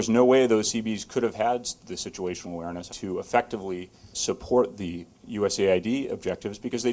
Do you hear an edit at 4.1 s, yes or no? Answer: yes